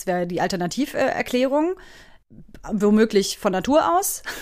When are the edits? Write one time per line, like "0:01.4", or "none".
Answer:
none